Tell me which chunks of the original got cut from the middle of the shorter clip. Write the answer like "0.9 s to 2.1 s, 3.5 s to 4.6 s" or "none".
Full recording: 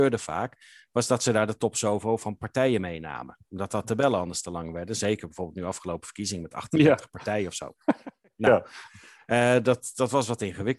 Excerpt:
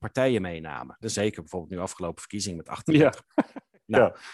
3.4 s to 4.9 s, 7.1 s to 7.8 s